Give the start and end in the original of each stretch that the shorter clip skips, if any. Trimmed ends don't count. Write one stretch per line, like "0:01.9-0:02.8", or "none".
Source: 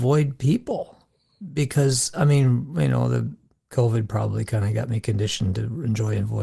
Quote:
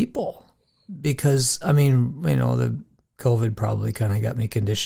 none